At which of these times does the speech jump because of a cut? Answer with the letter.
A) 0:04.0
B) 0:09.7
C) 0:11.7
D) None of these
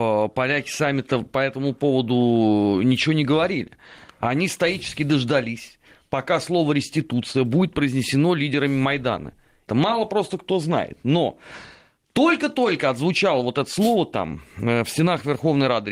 B